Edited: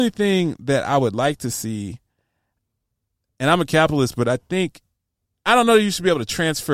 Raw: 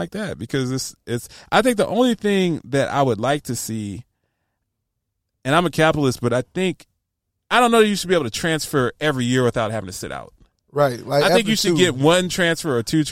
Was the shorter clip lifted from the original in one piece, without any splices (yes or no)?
yes